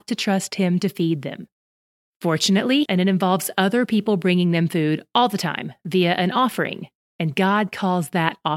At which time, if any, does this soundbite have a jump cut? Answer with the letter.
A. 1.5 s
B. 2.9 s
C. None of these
B